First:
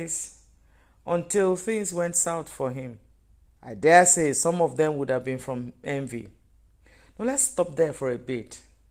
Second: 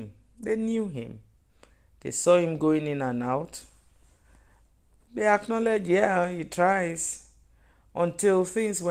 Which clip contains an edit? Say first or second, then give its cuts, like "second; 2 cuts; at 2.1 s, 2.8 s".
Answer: first; 1 cut; at 3.5 s